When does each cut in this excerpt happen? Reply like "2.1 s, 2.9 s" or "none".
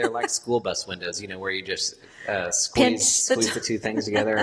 none